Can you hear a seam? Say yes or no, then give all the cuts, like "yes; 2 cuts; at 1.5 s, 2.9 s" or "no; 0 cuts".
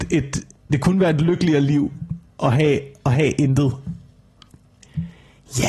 no; 0 cuts